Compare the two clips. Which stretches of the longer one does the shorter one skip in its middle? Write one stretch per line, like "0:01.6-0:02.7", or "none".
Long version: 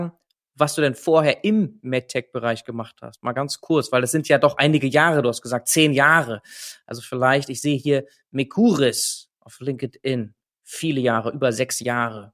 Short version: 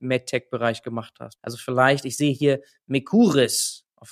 0:03.2-0:06.8